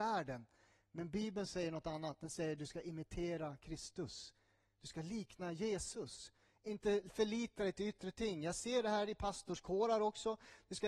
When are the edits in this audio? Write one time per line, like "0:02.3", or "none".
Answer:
none